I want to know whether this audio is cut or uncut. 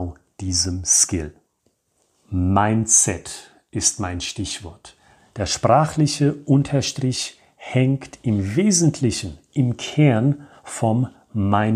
uncut